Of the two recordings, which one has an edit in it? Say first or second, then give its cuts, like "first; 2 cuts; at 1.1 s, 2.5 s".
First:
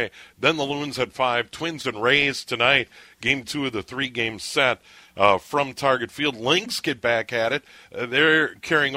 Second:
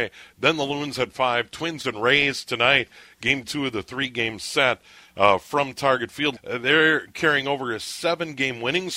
second; 1 cut; at 6.4 s